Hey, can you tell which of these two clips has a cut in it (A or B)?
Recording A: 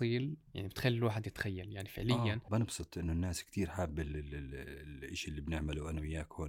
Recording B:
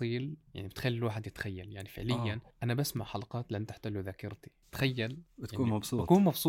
A